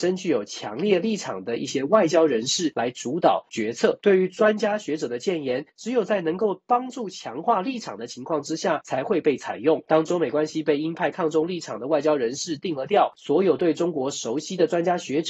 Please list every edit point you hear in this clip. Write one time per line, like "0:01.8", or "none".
0:13.1